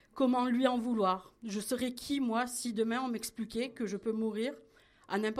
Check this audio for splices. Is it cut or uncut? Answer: uncut